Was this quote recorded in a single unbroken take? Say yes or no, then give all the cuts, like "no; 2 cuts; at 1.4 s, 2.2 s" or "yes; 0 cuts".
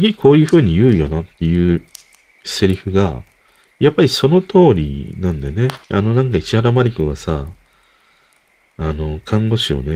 no; 1 cut; at 5.8 s